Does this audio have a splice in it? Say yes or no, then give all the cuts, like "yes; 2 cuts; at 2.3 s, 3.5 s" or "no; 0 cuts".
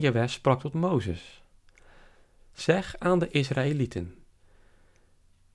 no; 0 cuts